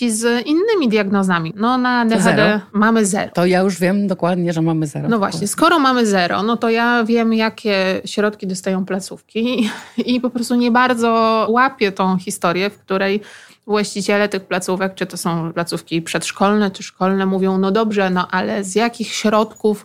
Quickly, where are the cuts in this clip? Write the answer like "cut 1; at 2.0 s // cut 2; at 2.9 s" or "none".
cut 1; at 1.5 s